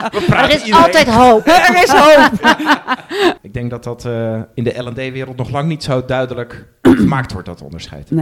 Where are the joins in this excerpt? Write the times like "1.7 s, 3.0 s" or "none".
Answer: 3.4 s